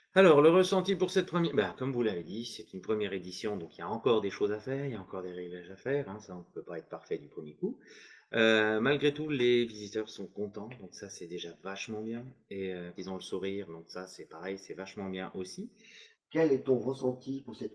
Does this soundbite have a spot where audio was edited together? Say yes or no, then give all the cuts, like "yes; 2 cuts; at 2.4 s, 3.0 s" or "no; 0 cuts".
yes; 2 cuts; at 13.0 s, 16.1 s